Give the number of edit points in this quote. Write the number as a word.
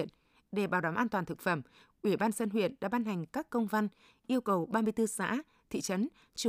zero